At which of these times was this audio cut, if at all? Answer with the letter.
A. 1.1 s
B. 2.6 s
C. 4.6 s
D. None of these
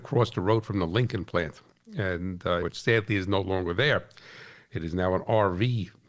B